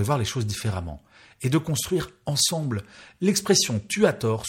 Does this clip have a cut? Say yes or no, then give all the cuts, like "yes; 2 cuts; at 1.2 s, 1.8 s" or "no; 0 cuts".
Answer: no; 0 cuts